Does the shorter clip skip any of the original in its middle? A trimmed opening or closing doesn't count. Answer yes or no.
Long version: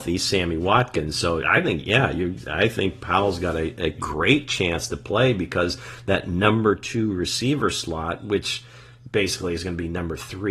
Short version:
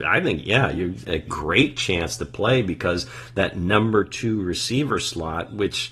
yes